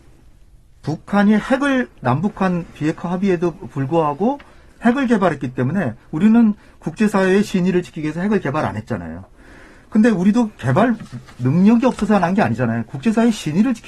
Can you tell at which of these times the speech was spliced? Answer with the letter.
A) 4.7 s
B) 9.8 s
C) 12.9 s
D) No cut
D